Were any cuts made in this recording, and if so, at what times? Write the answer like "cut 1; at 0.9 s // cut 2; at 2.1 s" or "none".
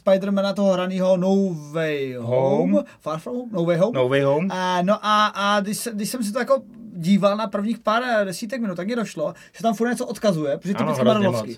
none